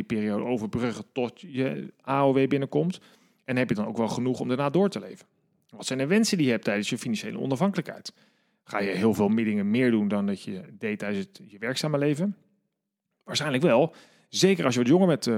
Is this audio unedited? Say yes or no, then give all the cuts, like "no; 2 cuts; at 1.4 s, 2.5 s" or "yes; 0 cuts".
yes; 0 cuts